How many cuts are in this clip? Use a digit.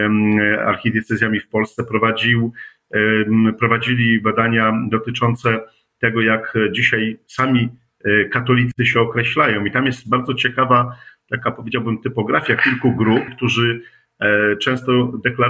1